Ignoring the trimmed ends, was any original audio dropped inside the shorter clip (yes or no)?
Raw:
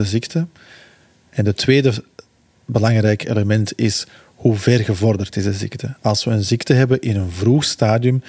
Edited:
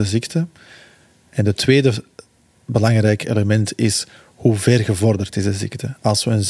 no